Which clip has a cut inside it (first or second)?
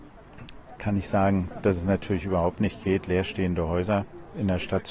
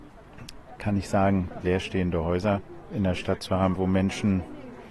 second